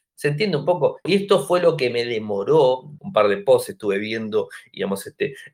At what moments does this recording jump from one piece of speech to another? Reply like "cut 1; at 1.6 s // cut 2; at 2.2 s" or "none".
cut 1; at 1.1 s // cut 2; at 3.0 s